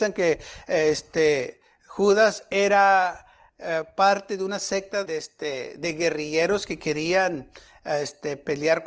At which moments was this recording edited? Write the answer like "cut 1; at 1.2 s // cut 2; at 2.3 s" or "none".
cut 1; at 5.1 s